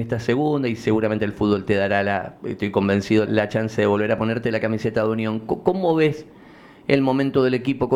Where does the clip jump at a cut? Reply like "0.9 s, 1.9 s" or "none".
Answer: 3.3 s